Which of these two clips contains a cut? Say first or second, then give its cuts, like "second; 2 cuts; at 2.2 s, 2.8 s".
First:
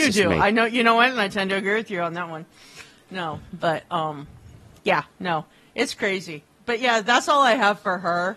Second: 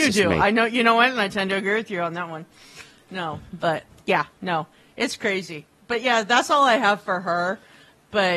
second; 1 cut; at 3.9 s